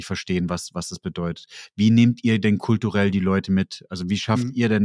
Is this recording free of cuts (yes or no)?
yes